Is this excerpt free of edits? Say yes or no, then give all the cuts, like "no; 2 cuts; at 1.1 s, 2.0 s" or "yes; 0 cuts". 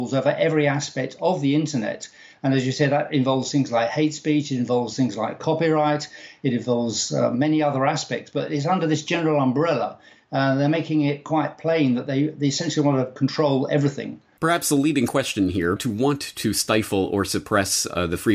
no; 2 cuts; at 14.4 s, 15.8 s